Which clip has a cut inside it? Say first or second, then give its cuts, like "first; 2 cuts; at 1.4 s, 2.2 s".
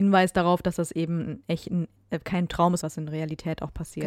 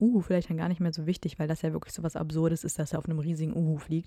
first; 1 cut; at 2.8 s